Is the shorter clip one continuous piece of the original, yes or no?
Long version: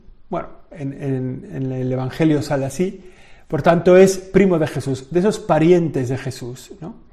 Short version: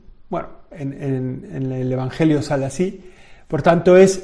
yes